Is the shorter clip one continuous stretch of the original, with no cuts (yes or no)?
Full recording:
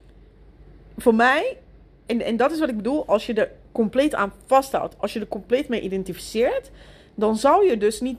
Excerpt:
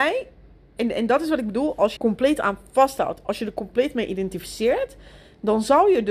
no